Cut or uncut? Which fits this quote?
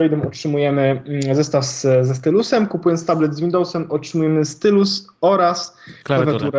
uncut